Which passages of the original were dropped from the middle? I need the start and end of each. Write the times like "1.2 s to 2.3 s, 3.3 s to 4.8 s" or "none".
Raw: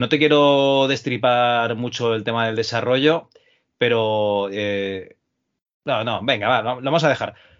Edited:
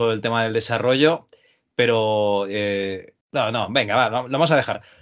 5.2 s to 5.7 s